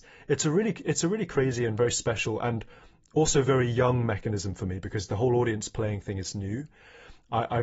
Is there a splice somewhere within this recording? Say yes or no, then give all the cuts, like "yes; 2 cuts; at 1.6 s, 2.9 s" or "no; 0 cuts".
no; 0 cuts